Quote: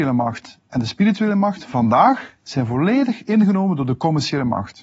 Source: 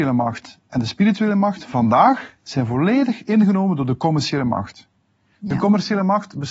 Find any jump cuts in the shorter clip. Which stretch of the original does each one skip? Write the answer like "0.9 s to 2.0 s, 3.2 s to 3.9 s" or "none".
none